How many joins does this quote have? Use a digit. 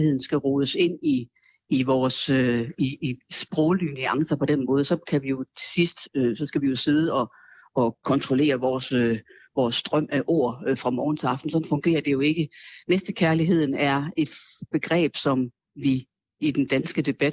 1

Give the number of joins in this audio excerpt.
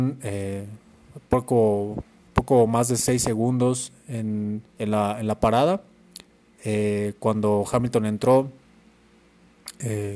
1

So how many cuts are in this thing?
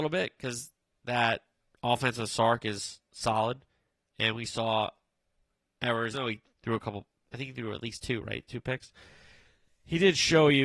1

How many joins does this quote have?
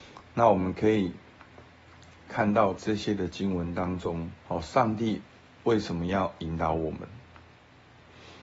2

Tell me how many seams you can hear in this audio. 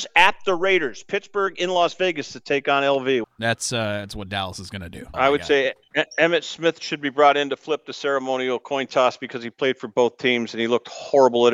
2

